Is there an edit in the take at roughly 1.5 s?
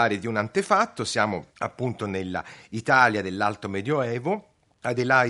yes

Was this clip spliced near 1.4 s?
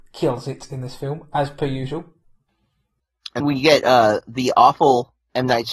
no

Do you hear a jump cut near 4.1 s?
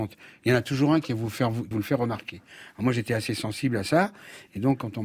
no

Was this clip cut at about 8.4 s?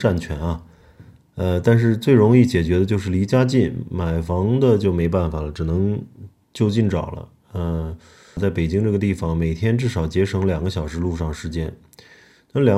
yes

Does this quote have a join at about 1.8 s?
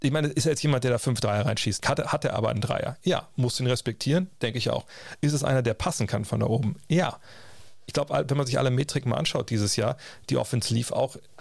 yes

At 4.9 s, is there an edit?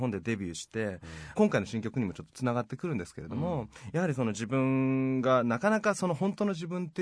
no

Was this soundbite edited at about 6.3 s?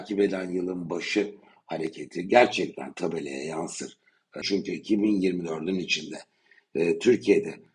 no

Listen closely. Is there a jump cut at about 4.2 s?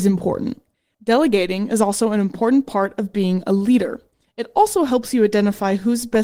yes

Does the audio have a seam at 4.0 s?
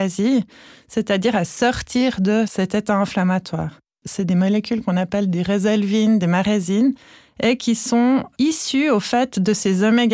yes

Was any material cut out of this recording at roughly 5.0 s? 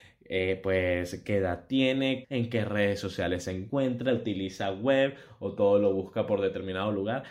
no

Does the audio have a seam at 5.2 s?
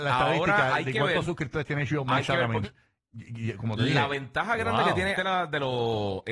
yes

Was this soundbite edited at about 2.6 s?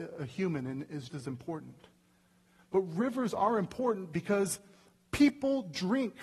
no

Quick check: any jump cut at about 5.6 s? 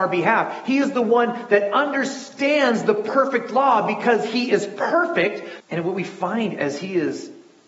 yes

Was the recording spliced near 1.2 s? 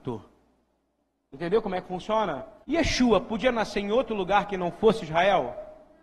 no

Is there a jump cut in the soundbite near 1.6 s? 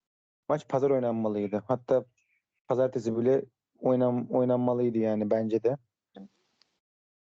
no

